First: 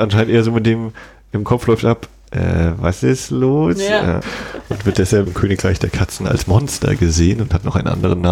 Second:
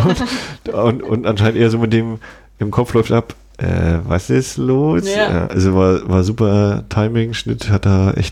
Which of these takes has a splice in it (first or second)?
first